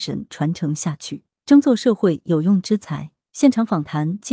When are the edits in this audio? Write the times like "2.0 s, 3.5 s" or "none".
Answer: 3.2 s